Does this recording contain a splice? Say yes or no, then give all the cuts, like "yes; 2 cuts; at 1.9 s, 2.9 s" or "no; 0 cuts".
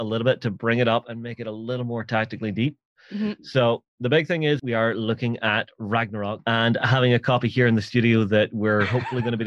yes; 2 cuts; at 4.6 s, 6.4 s